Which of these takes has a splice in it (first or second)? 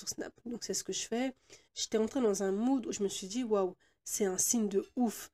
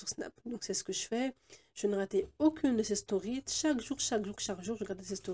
first